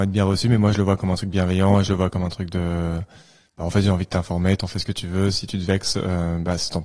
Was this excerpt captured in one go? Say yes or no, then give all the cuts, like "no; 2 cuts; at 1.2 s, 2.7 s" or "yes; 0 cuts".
yes; 0 cuts